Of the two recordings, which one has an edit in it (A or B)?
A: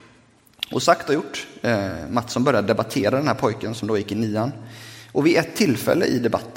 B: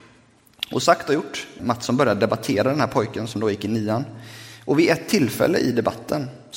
B